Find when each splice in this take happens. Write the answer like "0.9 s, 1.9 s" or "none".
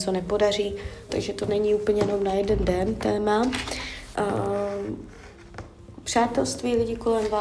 1.1 s, 4.1 s